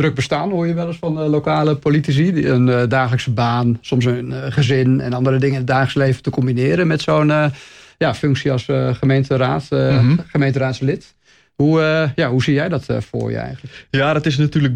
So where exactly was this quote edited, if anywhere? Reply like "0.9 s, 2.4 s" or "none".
none